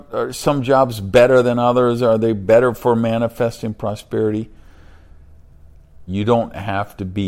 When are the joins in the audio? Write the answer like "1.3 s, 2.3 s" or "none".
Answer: 6.1 s